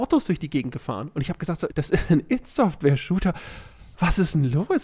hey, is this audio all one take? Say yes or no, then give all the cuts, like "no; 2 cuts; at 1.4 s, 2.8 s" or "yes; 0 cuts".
no; 1 cut; at 1.7 s